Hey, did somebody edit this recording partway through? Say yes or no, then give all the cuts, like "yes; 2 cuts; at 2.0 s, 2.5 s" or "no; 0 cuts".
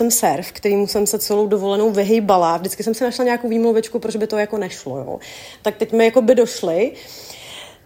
no; 0 cuts